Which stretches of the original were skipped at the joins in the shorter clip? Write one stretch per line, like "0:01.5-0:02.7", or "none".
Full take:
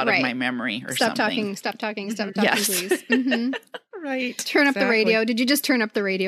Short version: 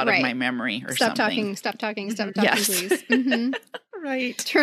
none

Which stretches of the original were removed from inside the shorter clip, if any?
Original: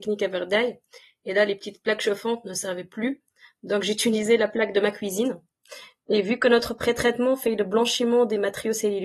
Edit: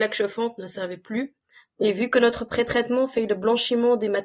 0:03.6-0:06.0

